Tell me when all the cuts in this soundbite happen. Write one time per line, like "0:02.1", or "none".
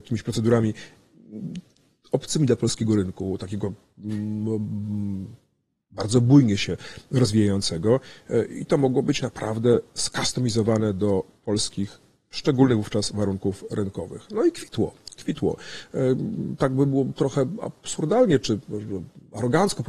none